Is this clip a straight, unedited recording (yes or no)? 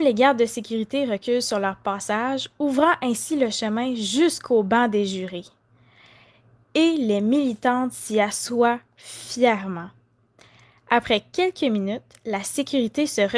yes